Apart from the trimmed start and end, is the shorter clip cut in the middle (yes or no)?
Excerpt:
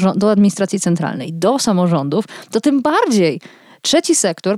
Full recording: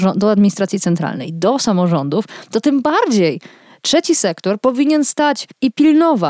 no